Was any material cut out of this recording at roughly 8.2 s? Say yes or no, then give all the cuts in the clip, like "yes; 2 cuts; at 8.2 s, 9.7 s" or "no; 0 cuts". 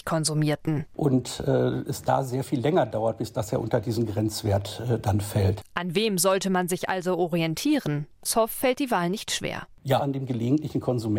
yes; 2 cuts; at 8.2 s, 10.0 s